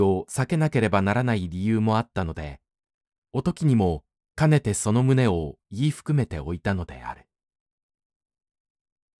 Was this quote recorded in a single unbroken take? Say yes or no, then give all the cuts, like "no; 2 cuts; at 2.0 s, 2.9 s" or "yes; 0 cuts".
yes; 0 cuts